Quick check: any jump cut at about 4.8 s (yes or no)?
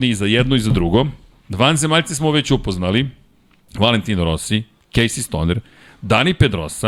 no